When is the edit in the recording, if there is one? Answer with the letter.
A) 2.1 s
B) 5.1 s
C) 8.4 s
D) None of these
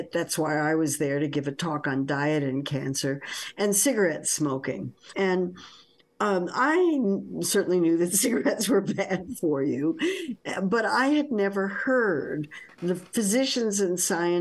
B